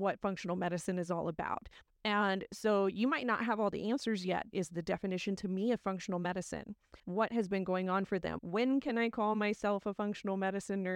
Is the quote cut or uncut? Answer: cut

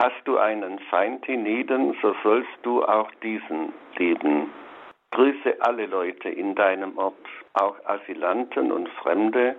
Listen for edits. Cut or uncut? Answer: cut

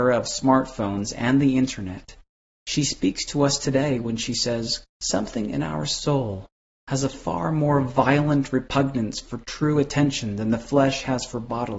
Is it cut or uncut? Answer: cut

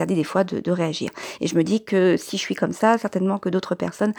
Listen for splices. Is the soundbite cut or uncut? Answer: uncut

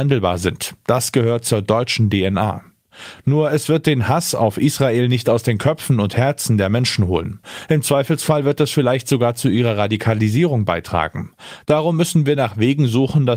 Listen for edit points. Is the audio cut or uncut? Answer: uncut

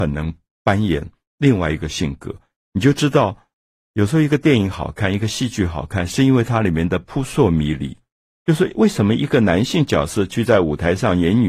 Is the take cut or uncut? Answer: cut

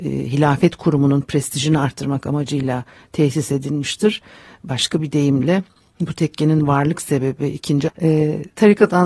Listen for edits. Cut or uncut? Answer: cut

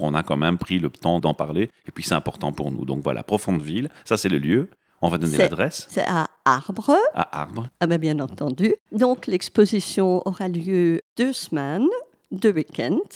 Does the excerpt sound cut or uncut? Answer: cut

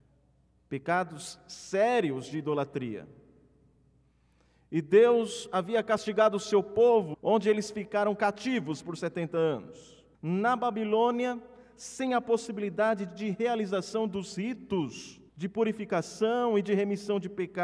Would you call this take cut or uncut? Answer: cut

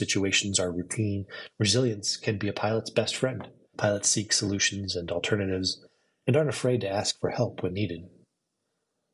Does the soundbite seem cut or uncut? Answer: cut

